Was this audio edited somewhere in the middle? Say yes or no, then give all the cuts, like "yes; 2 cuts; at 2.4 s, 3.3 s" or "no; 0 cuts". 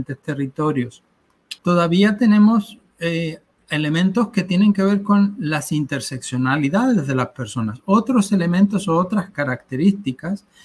yes; 1 cut; at 1.6 s